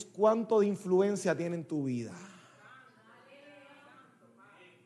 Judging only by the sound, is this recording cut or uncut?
uncut